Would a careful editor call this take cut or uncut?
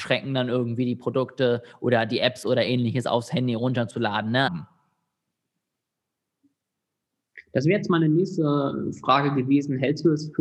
cut